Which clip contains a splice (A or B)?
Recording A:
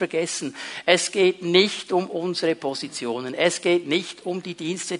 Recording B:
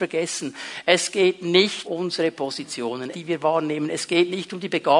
B